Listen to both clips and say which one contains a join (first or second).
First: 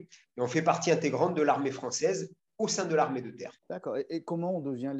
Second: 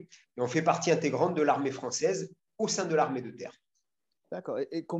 first